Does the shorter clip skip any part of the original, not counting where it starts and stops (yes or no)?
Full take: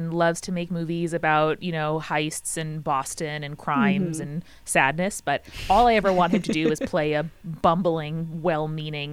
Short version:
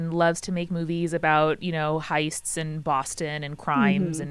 no